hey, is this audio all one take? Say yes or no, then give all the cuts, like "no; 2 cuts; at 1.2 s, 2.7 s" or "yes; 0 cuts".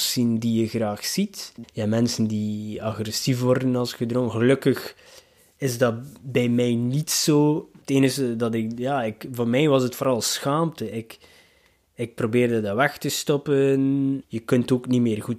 no; 2 cuts; at 1.6 s, 14.2 s